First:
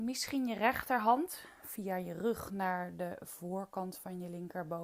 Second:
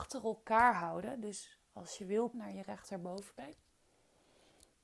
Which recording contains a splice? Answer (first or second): second